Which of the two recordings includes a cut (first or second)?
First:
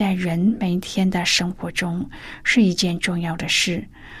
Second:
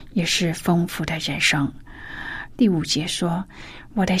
second